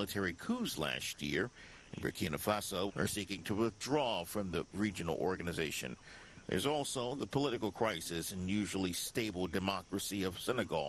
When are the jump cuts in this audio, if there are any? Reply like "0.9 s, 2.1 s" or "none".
2.9 s